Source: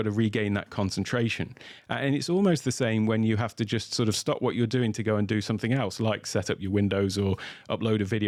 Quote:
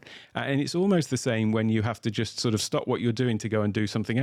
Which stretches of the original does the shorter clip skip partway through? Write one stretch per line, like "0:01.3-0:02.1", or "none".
none